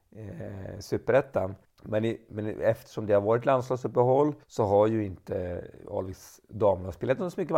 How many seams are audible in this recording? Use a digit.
2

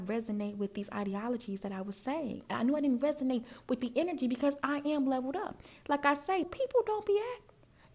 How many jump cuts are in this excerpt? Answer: 1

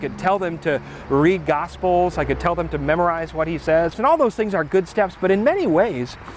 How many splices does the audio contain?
2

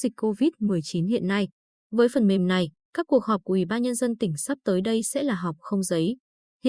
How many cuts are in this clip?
0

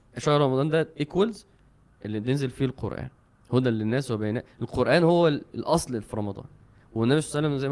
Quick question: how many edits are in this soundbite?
0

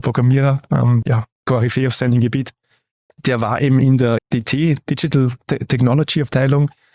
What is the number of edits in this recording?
3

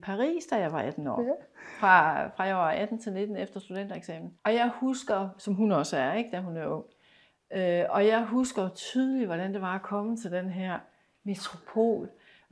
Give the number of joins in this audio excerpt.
1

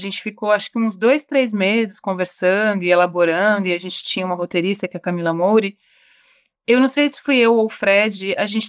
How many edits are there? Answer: 0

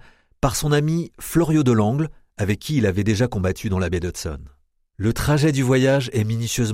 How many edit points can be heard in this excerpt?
0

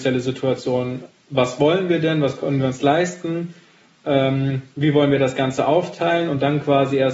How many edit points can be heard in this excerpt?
0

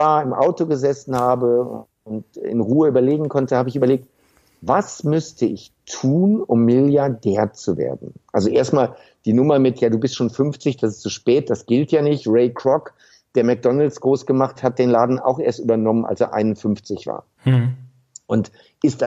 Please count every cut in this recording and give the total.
1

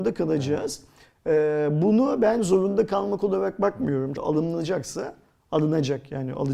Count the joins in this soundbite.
1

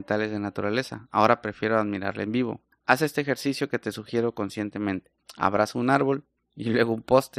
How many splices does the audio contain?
1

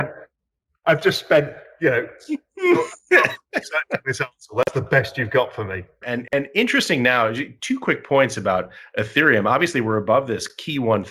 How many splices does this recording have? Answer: 1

